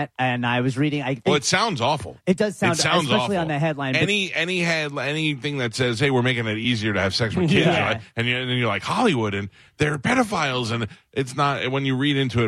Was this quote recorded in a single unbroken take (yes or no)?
yes